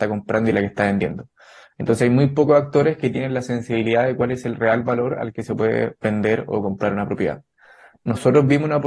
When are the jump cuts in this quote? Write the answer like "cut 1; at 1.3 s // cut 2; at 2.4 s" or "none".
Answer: none

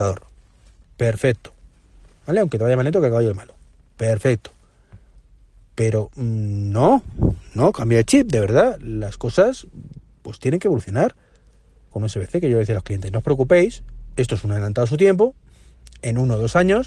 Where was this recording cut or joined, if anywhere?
cut 1; at 11.9 s

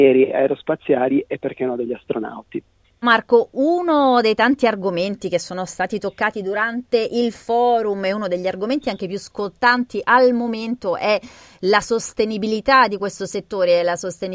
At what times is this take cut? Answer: cut 1; at 3.0 s

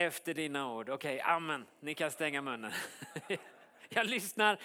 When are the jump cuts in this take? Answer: none

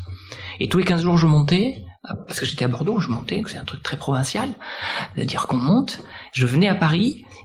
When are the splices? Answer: cut 1; at 3.4 s

